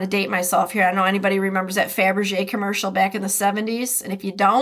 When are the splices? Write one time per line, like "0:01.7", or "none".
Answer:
none